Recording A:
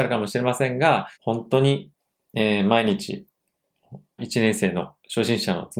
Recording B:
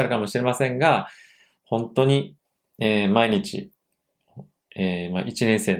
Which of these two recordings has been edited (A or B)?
A